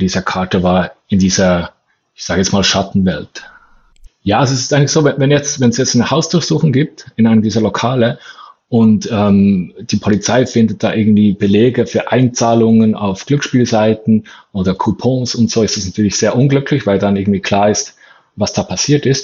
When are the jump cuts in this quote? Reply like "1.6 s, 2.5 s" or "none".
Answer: 4.1 s